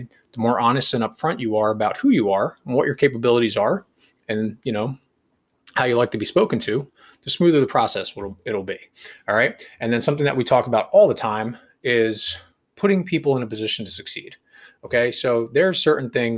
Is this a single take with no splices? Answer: yes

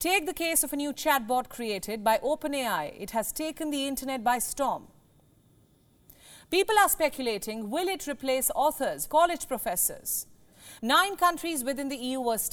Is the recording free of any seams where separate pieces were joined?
no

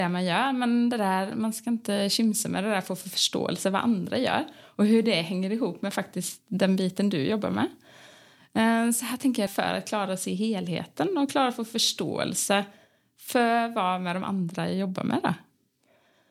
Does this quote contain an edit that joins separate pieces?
yes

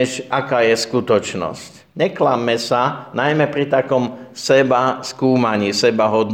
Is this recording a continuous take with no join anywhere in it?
yes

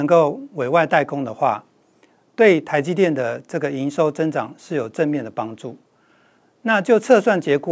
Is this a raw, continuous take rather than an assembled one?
yes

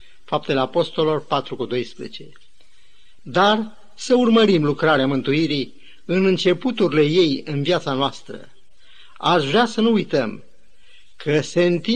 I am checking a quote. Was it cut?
no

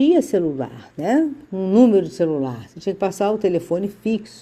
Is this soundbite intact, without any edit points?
yes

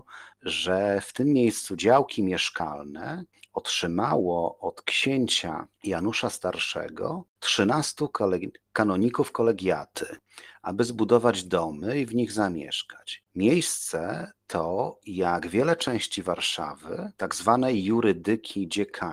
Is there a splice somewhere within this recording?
yes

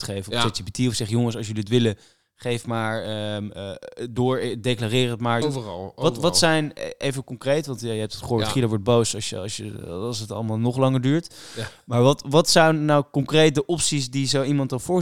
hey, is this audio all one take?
no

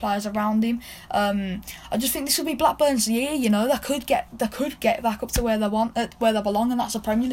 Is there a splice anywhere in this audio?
no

